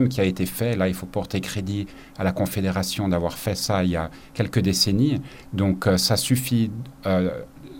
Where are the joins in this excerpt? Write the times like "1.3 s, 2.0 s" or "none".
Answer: 5.4 s